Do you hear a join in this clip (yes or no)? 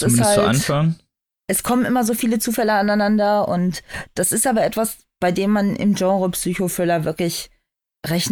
no